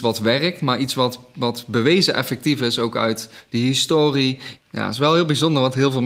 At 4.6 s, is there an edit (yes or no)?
yes